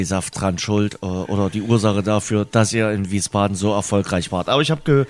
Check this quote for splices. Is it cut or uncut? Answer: uncut